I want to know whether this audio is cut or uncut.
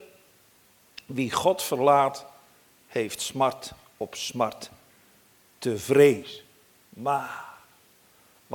uncut